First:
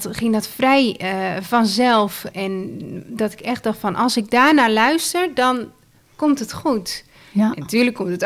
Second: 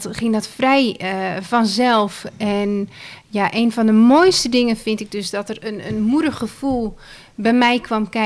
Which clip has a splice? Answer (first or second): first